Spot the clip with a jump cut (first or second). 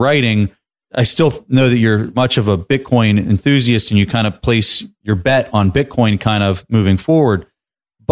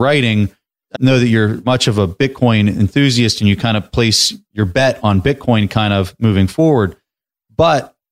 second